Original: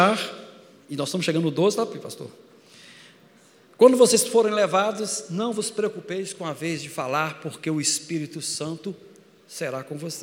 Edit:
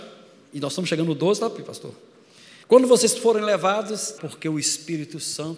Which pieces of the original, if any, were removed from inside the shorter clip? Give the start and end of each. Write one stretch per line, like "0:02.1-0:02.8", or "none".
0:03.0-0:03.7
0:05.3-0:07.4